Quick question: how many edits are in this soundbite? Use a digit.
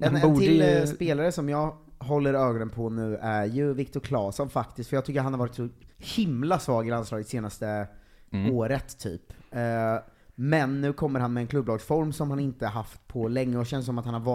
1